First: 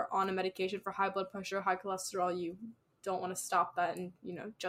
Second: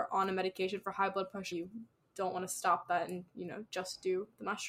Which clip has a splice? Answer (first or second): second